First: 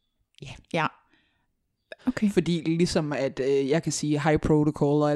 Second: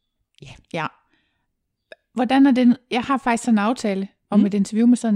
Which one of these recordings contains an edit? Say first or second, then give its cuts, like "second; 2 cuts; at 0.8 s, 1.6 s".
first; 1 cut; at 2.0 s